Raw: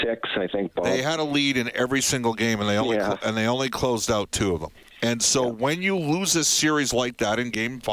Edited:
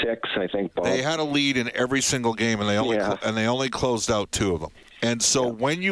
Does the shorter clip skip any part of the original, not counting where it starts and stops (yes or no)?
no